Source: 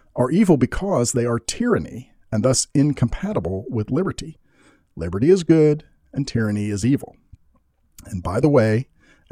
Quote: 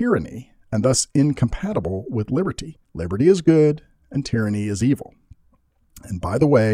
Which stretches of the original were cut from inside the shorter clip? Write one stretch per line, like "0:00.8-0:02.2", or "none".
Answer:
0:04.4-0:04.9